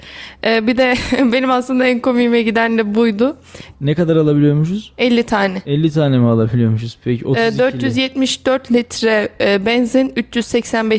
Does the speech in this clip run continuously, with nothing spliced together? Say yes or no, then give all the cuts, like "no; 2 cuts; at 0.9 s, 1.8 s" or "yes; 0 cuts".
no; 1 cut; at 3.7 s